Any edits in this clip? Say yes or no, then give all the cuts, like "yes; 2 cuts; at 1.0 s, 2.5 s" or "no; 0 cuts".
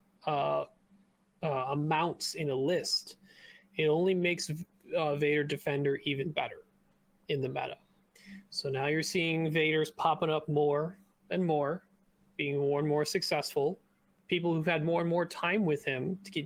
no; 0 cuts